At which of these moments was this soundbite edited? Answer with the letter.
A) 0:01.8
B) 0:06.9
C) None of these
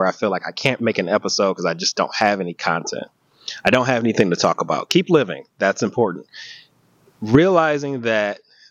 C